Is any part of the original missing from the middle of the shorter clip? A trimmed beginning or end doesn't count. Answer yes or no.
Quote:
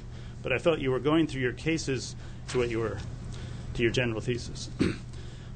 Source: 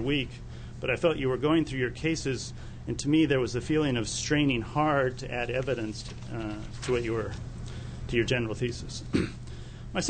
yes